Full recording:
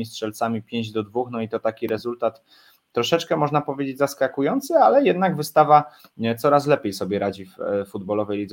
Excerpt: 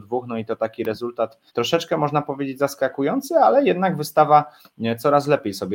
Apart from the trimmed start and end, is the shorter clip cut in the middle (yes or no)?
yes